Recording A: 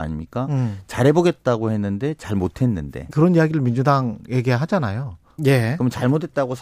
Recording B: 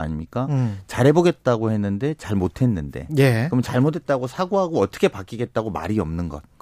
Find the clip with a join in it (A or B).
A